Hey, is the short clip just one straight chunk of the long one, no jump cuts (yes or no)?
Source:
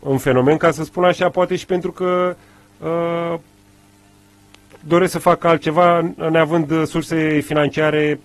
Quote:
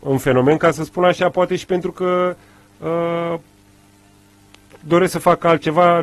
yes